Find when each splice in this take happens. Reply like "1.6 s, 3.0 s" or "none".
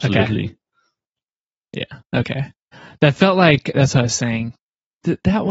none